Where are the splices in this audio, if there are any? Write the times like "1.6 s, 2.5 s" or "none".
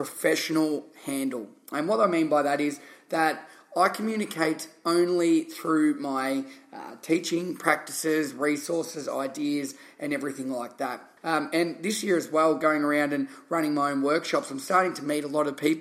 11.2 s